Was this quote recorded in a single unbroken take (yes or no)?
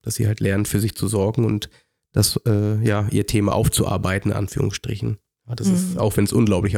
yes